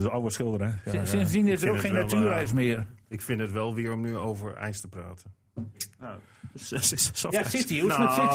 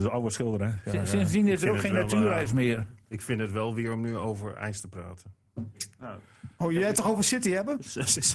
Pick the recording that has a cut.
first; 1 cut; at 6.5 s

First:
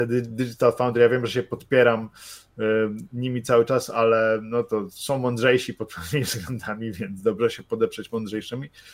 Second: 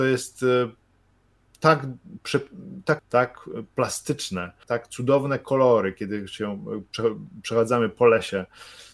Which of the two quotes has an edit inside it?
second; 2 cuts; at 3.0 s, 4.6 s

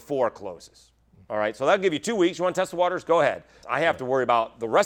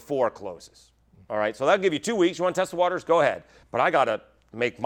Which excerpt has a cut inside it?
first; 1 cut; at 3.6 s

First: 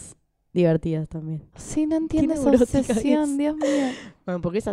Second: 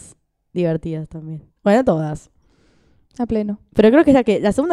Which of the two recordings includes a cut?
first; 1 cut; at 1.5 s

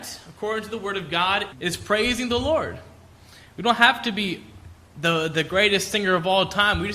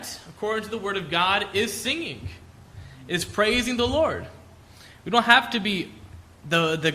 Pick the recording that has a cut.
first; 1 cut; at 1.5 s

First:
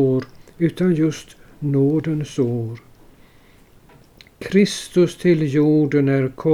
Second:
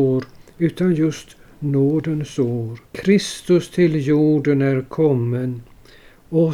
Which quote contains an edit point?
second; 1 cut; at 2.9 s

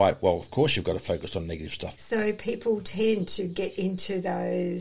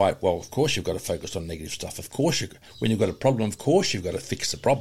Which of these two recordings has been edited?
first; 1 cut; at 1.9 s

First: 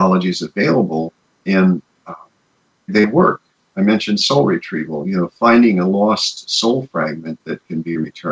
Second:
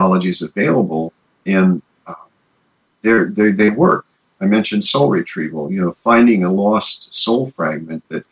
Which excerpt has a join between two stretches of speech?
first; 1 cut; at 2.9 s

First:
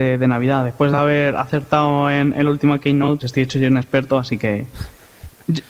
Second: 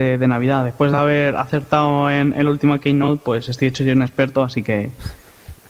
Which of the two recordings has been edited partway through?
first; 1 cut; at 3.2 s

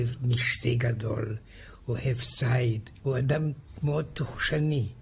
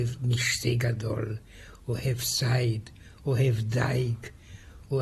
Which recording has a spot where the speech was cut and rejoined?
first; 1 cut; at 3.0 s

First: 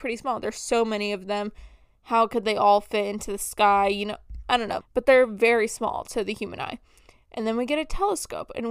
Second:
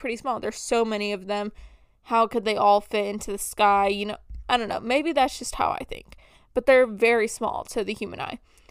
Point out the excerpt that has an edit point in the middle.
first; 1 cut; at 4.8 s

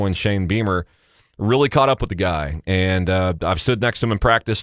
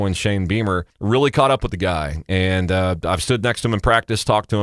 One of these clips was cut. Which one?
second; 1 cut; at 0.9 s

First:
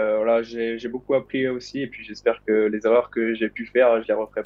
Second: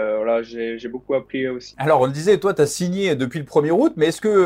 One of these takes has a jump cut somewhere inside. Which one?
second; 1 cut; at 1.7 s

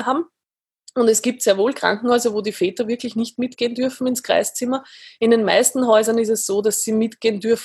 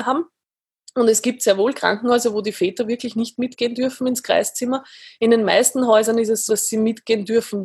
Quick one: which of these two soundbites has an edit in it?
second; 1 cut; at 6.5 s

